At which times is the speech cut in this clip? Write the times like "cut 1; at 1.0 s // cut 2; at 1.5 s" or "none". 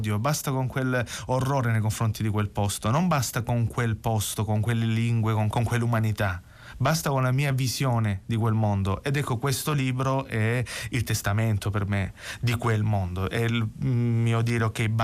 cut 1; at 5.5 s

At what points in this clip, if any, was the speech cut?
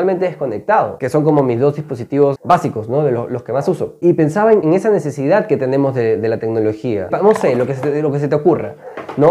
cut 1; at 7.1 s

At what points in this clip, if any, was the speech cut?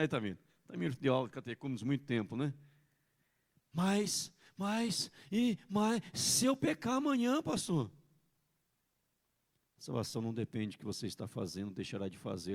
none

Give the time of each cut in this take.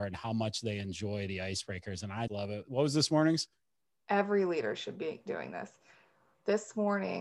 cut 1; at 2.3 s

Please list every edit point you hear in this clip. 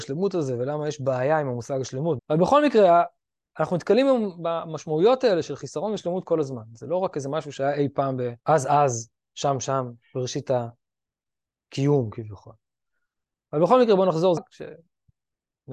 cut 1; at 2.2 s // cut 2; at 8.4 s // cut 3; at 14.4 s

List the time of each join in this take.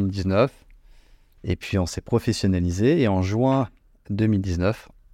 cut 1; at 1.4 s

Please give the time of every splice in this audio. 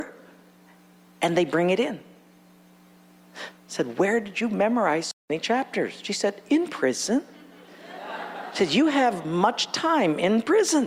cut 1; at 3.5 s

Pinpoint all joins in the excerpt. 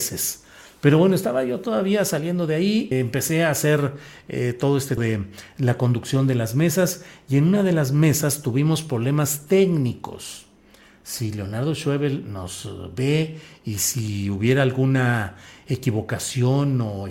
cut 1; at 2.9 s // cut 2; at 5.0 s

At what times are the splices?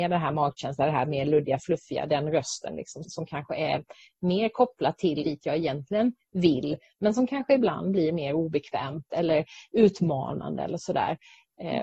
cut 1; at 3.0 s // cut 2; at 5.2 s

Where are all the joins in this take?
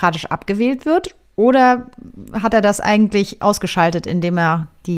cut 1; at 1.3 s

